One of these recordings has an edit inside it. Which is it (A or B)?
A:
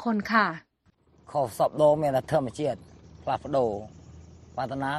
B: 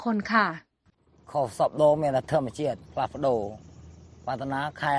B